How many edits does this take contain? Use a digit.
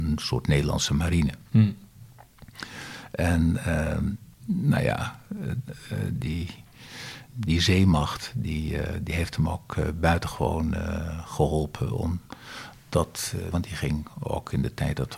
3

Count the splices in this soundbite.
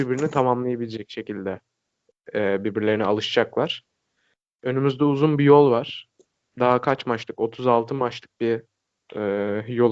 0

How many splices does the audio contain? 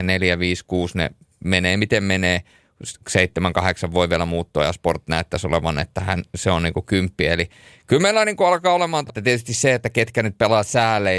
1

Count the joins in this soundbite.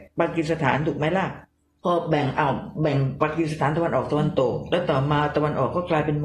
0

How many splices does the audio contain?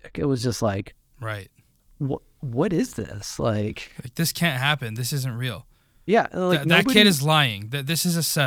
0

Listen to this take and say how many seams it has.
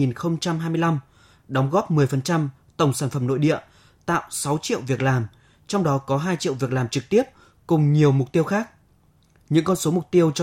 0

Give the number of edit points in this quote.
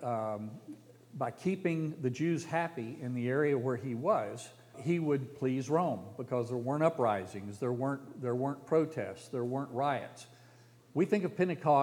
2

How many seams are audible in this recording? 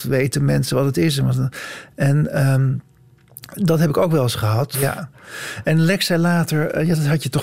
1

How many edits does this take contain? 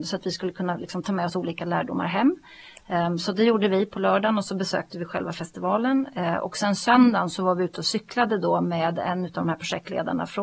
0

